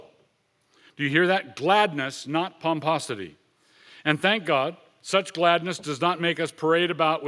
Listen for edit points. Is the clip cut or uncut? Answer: uncut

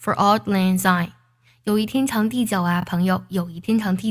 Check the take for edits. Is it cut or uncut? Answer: uncut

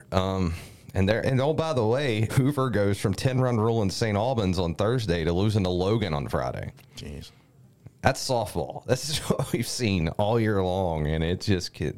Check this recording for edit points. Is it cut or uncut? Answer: cut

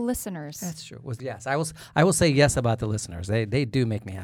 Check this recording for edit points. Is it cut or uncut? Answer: cut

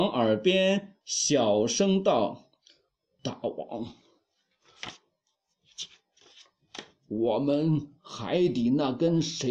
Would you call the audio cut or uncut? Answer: uncut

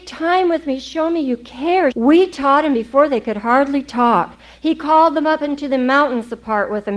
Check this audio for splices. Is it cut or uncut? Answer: cut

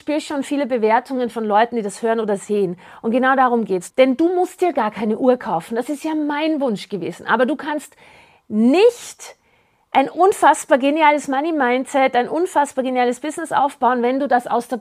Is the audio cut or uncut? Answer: cut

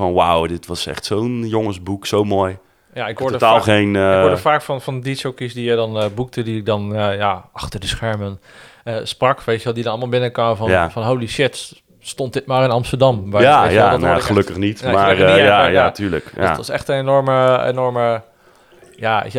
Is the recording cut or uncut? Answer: uncut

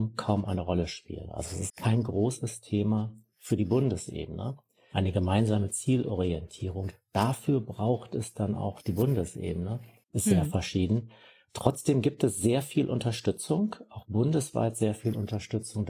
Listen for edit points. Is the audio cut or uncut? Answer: cut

